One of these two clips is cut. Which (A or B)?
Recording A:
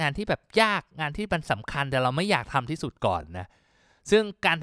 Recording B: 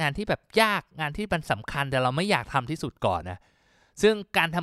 B